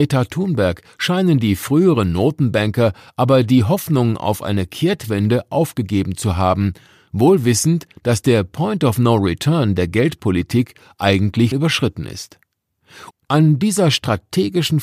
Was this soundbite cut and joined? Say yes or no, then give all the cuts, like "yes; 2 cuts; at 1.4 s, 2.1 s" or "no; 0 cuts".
yes; 2 cuts; at 11.5 s, 13.1 s